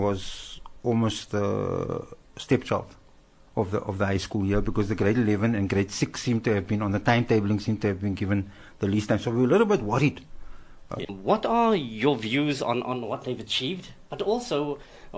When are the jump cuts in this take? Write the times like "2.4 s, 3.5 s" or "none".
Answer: 11.0 s